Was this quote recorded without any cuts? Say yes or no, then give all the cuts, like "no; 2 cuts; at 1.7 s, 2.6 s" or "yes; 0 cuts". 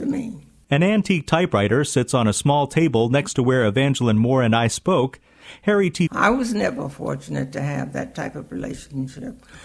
no; 1 cut; at 6.1 s